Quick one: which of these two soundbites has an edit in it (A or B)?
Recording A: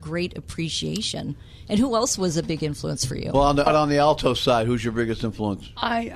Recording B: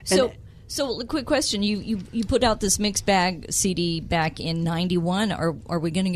A